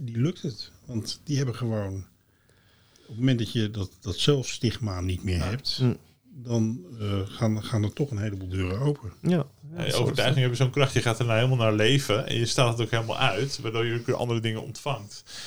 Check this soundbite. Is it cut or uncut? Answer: uncut